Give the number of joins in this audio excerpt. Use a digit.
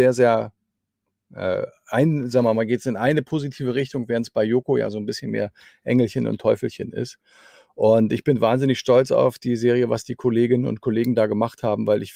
0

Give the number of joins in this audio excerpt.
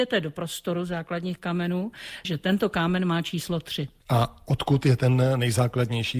1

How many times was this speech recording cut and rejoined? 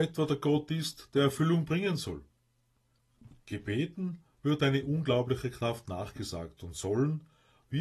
0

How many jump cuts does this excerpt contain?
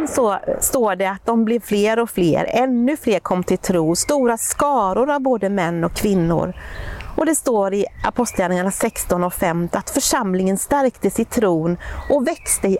0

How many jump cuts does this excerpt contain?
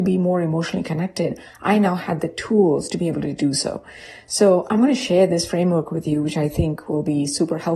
0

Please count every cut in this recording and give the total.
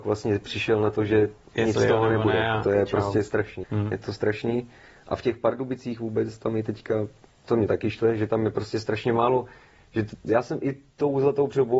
1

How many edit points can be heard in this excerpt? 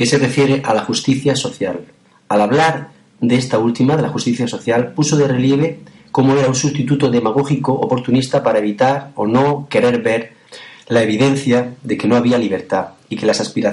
0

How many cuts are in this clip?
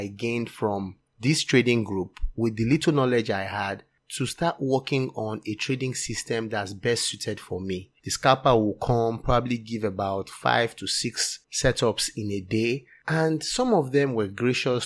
1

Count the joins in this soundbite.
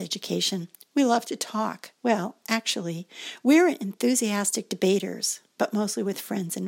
1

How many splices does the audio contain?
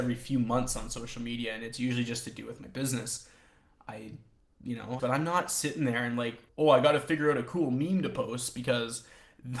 2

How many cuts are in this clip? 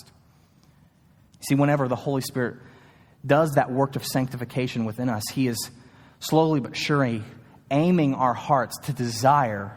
1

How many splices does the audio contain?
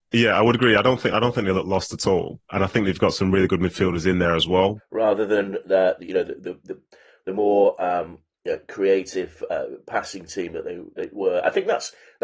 1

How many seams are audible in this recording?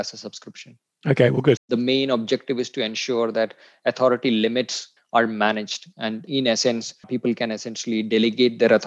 3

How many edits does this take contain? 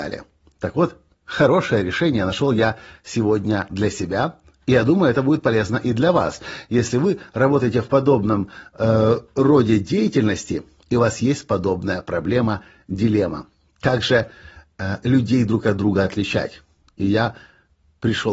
0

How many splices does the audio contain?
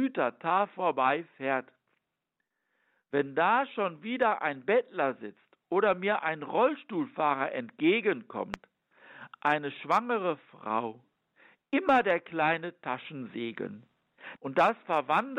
1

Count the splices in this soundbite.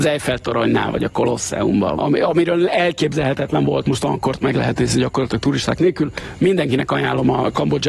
2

